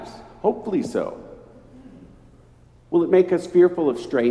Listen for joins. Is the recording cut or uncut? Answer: uncut